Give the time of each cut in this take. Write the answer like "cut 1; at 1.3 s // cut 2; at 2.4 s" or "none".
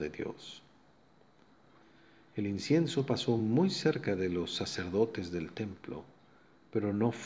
none